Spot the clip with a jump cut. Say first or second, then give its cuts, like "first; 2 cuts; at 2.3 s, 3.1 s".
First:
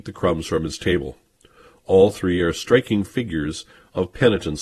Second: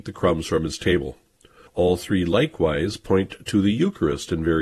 second; 1 cut; at 1.7 s